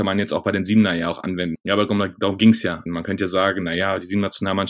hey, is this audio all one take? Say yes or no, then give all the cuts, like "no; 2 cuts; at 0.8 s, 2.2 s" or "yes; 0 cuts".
no; 2 cuts; at 1.5 s, 2.9 s